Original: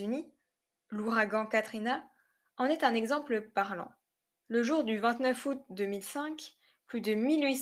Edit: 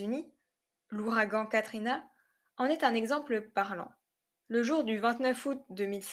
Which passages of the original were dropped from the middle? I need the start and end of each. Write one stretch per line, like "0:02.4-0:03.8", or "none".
none